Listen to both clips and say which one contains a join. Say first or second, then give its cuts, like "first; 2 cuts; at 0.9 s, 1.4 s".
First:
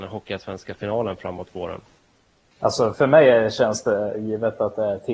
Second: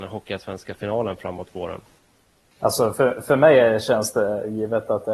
first; 1 cut; at 2.9 s